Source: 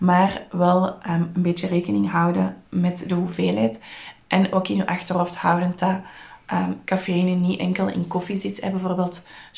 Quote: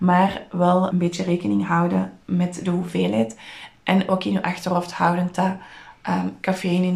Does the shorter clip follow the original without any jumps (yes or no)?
no